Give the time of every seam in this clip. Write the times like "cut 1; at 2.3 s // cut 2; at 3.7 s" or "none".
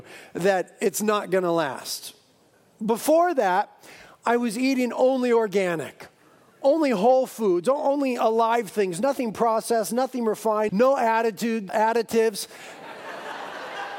cut 1; at 10.7 s // cut 2; at 11.7 s